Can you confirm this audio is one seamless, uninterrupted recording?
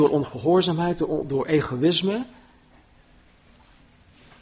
yes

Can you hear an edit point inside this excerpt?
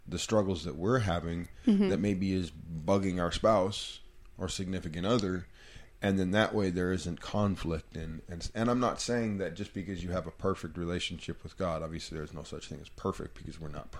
no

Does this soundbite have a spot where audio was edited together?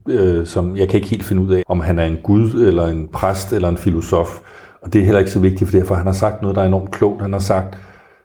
yes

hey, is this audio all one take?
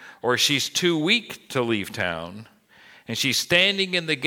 yes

